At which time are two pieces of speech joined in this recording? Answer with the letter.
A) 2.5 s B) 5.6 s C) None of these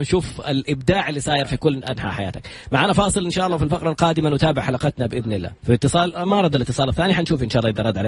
B